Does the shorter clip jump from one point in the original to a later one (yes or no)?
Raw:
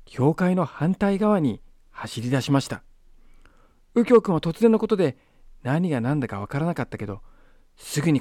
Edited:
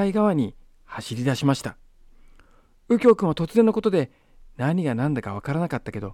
no